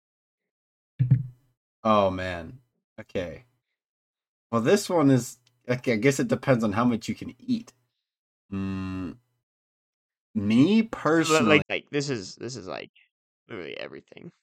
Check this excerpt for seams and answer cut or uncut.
cut